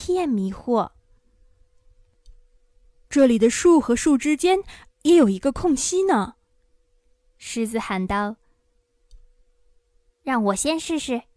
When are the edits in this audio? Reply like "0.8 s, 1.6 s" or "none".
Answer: none